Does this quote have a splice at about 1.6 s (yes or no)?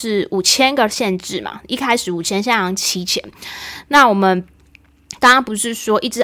no